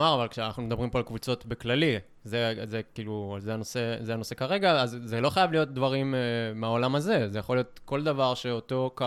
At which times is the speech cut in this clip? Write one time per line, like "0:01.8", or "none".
none